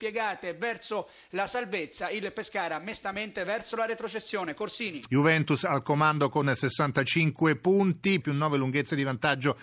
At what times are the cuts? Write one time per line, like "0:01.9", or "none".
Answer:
0:05.1
0:08.2